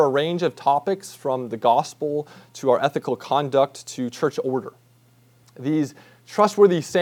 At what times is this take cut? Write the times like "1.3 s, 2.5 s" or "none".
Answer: 5.4 s